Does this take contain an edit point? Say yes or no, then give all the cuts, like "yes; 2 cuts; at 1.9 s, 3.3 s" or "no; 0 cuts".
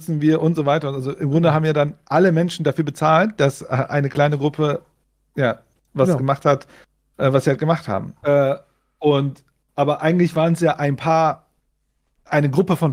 yes; 1 cut; at 8.2 s